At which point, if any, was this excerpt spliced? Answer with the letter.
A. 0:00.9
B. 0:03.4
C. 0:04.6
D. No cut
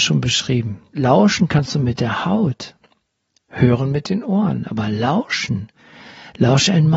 A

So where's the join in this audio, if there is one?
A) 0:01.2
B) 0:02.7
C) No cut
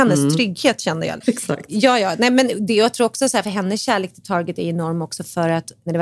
A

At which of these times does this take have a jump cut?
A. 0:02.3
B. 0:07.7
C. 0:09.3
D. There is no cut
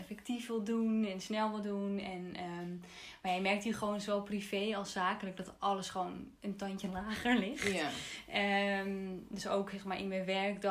D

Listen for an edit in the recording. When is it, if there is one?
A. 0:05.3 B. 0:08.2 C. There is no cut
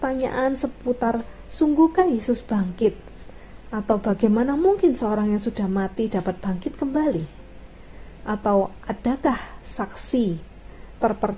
B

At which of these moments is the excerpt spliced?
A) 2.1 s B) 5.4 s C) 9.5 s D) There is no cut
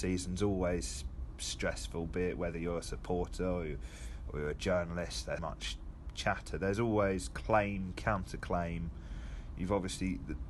B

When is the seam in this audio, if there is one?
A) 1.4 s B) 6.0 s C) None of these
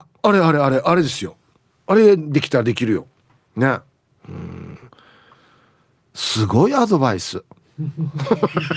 C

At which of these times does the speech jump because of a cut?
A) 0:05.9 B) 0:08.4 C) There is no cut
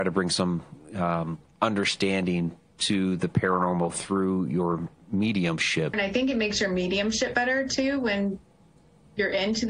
A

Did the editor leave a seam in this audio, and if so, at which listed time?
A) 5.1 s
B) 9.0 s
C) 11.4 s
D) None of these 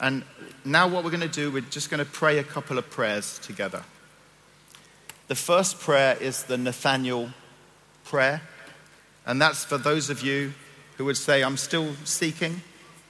D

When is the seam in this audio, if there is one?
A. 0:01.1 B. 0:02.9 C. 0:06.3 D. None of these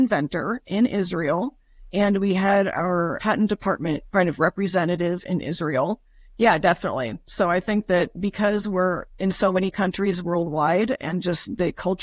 C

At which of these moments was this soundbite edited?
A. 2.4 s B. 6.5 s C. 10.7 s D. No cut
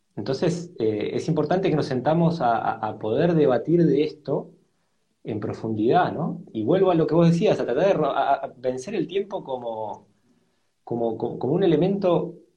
B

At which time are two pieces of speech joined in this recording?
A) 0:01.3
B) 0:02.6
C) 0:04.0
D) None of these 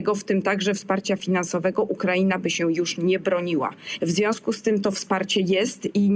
C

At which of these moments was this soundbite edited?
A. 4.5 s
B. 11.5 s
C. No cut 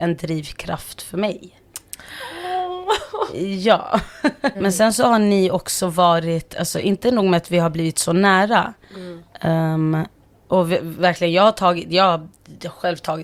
A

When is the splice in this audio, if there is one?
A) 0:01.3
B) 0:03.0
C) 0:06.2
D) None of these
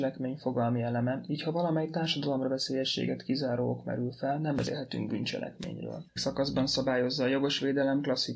C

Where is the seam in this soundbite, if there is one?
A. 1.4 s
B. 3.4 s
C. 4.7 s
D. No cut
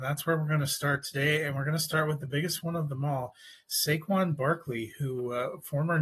D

